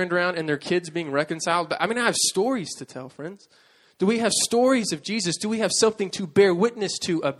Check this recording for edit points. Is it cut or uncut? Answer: uncut